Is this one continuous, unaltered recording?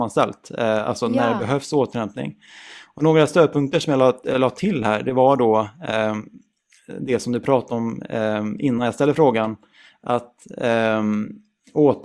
yes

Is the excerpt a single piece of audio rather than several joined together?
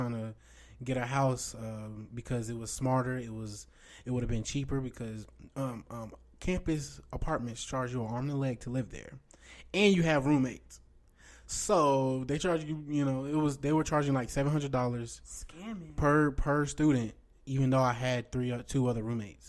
yes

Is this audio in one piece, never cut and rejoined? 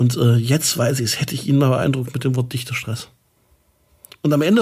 yes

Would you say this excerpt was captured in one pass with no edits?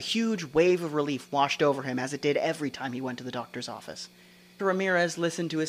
no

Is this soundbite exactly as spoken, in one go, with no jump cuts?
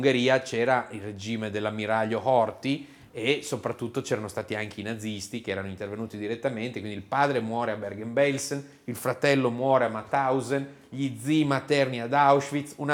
yes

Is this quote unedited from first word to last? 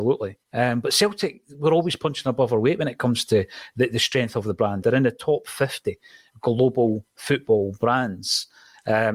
no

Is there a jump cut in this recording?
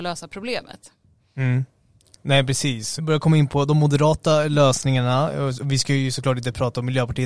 yes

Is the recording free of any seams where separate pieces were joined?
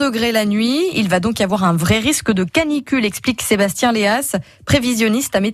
yes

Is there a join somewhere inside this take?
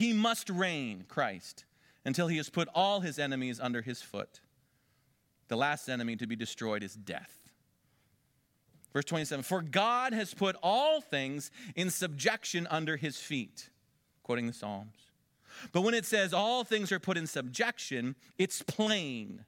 no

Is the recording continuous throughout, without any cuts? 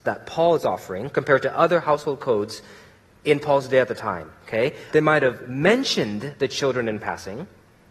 no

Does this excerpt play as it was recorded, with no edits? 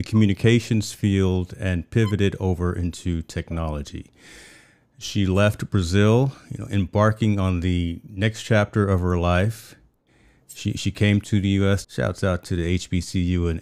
no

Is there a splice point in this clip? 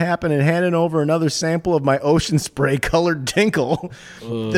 no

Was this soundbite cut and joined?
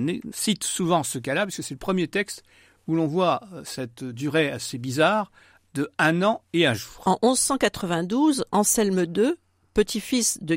no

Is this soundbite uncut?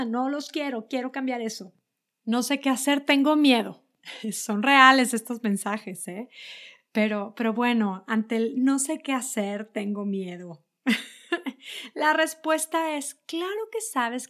yes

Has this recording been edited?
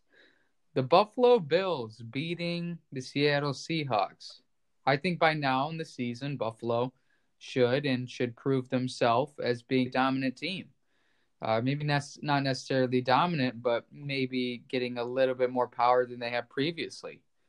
yes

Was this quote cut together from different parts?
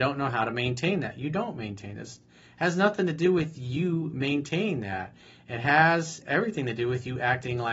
no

